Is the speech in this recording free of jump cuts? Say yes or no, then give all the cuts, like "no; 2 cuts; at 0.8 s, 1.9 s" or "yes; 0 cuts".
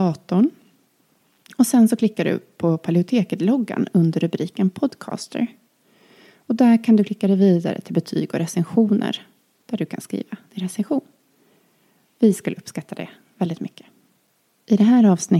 yes; 0 cuts